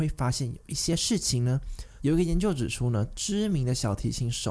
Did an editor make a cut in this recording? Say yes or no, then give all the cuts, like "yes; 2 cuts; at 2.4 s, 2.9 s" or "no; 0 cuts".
yes; 1 cut; at 2.0 s